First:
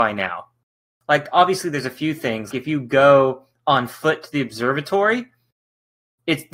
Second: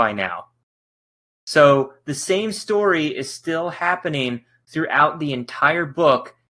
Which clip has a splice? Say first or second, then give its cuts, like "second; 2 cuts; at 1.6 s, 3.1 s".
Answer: first; 2 cuts; at 0.9 s, 2.5 s